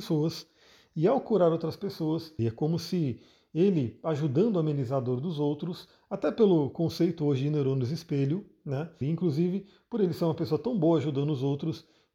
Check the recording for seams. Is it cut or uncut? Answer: cut